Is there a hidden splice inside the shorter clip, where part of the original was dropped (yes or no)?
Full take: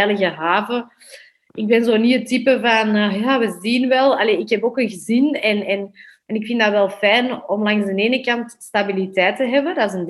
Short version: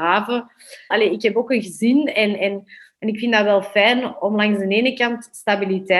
yes